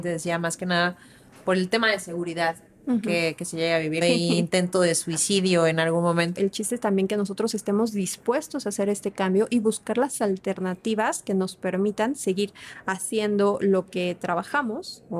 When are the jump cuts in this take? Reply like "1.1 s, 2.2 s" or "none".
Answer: 4.0 s, 6.3 s